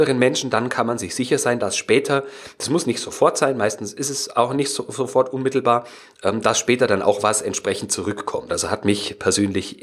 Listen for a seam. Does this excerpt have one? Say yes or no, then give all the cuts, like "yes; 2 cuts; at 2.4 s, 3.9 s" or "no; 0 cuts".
yes; 1 cut; at 8.5 s